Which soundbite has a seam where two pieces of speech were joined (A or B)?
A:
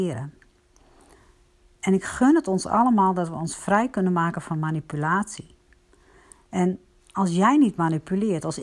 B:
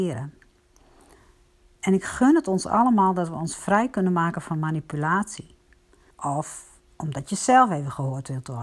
B